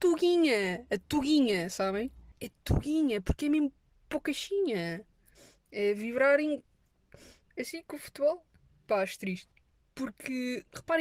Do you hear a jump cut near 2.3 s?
yes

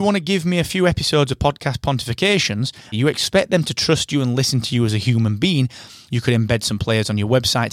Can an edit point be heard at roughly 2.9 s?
yes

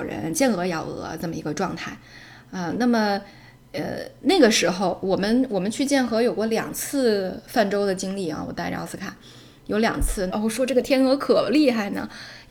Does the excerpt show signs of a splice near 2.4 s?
no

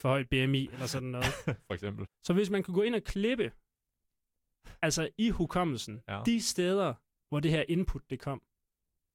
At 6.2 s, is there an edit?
no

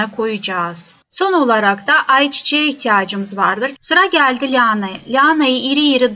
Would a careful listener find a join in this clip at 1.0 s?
no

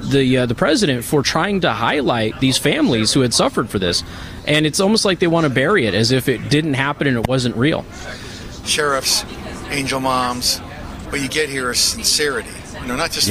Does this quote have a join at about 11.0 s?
yes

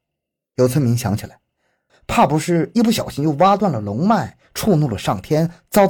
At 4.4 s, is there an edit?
no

